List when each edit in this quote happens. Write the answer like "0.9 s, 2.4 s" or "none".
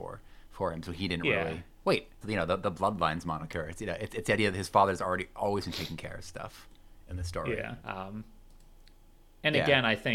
2.2 s, 7.8 s